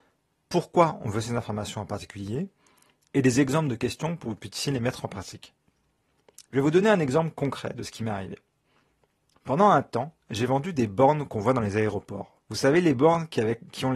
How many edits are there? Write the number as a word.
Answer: one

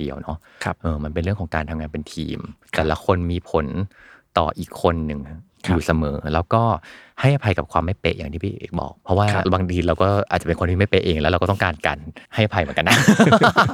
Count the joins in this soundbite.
two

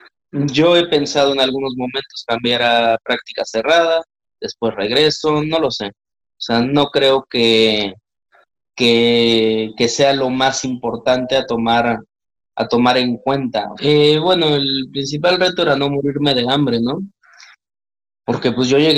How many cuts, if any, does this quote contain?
one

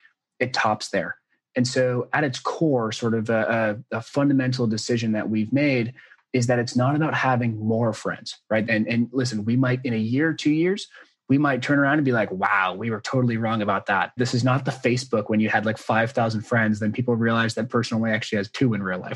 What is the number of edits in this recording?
two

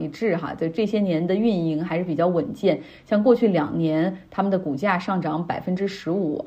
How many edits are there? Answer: zero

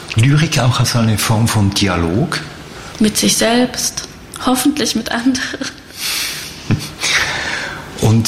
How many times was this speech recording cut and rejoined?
one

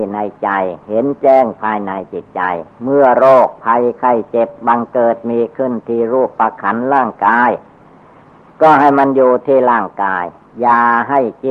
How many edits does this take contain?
zero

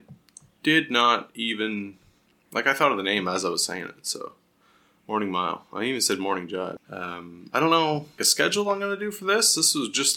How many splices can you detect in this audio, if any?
two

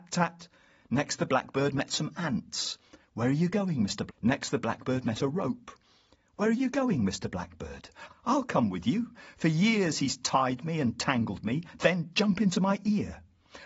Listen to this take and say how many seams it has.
two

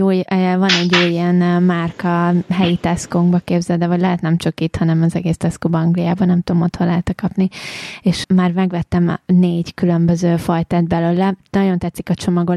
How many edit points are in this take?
one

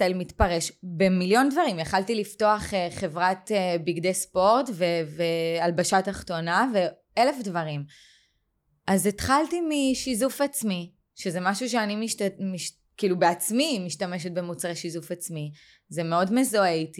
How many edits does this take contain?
zero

